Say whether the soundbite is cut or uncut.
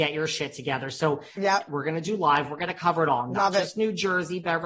cut